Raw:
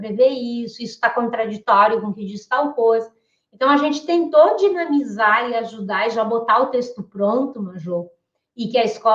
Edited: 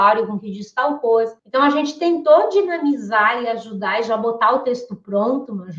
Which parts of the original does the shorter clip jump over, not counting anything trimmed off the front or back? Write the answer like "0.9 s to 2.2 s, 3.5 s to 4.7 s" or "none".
3.1 s to 3.5 s